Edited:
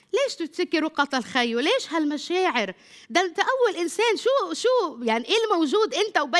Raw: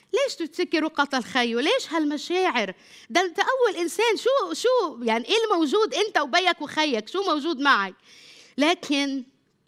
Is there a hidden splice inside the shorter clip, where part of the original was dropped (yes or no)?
no